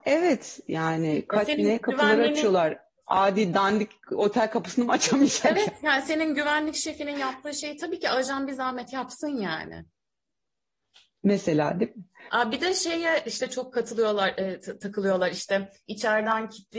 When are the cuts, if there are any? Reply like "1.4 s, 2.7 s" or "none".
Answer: 12.3 s